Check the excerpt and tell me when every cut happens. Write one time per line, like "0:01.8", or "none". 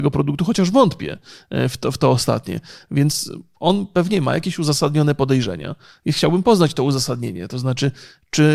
none